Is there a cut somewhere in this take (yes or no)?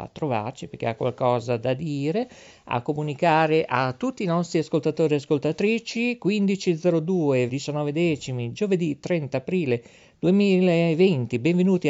yes